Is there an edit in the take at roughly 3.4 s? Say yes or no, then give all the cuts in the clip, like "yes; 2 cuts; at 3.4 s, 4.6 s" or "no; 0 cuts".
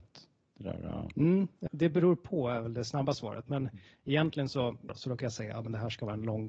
no; 2 cuts; at 1.7 s, 4.9 s